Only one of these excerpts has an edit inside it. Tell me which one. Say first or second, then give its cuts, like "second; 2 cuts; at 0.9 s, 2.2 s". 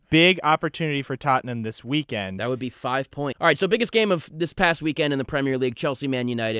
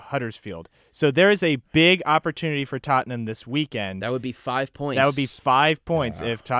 first; 1 cut; at 3.3 s